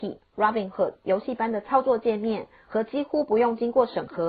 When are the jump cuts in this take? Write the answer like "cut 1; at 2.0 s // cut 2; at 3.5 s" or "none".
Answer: cut 1; at 1.0 s